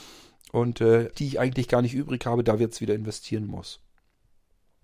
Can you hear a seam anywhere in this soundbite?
yes; 1 cut; at 1.1 s

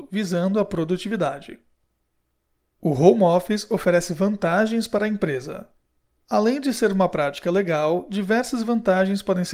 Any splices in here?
no; 0 cuts

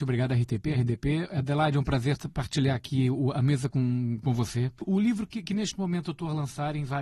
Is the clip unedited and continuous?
yes; 0 cuts

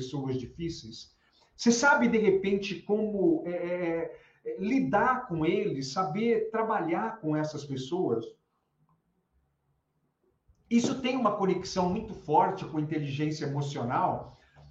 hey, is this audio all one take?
yes; 0 cuts

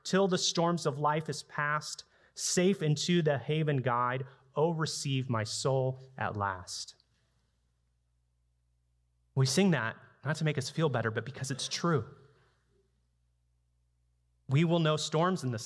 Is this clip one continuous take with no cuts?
yes; 0 cuts

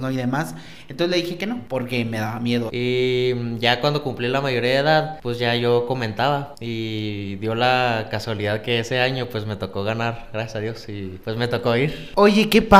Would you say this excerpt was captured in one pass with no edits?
no; 1 cut; at 2.7 s

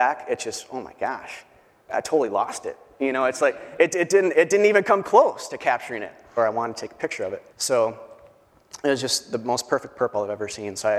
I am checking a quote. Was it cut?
yes; 2 cuts; at 6.4 s, 7.5 s

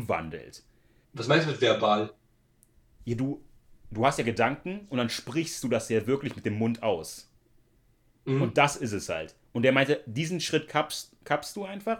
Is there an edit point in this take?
yes; 1 cut; at 1.0 s

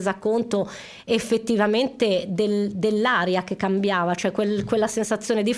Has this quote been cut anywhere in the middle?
no; 0 cuts

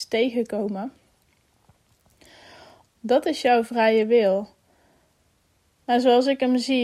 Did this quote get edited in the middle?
yes; 1 cut; at 2.8 s

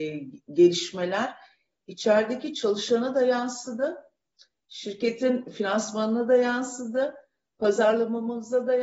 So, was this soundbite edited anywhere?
no; 0 cuts

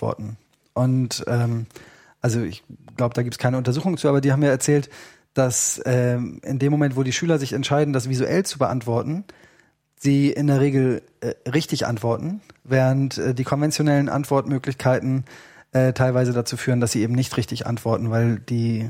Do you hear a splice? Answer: no; 0 cuts

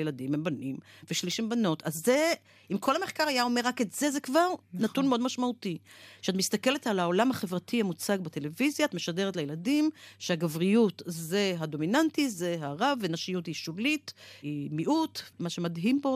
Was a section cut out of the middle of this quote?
no; 0 cuts

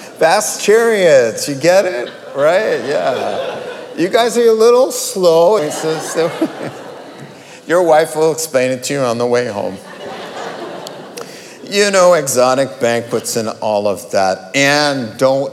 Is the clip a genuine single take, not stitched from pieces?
no; 1 cut; at 5.6 s

